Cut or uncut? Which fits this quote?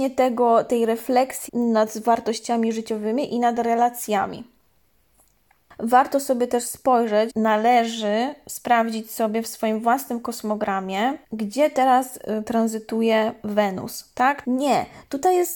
cut